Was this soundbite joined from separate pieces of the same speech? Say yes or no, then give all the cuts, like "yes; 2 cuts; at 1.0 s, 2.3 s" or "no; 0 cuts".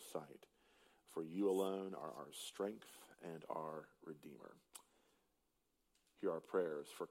no; 0 cuts